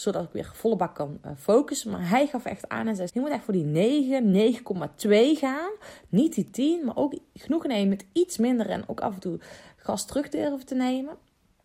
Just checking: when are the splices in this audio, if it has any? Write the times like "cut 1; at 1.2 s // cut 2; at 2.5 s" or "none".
cut 1; at 3.1 s